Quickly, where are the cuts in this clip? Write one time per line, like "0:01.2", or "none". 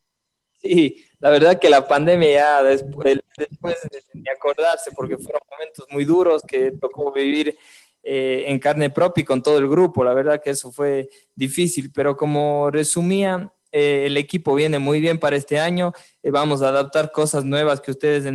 0:03.4